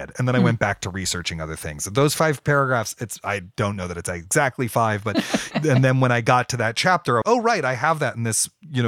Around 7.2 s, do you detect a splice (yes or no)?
yes